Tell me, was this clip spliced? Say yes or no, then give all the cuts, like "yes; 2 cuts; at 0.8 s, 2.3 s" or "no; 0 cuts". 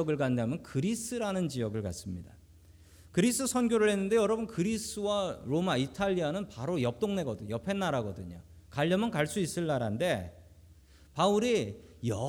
no; 0 cuts